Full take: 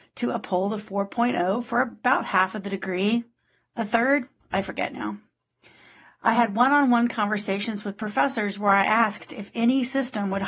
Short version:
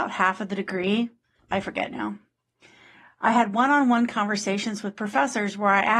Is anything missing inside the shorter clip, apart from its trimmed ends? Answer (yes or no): yes